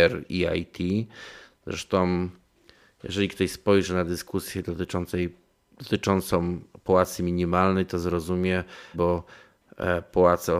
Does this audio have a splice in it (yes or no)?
yes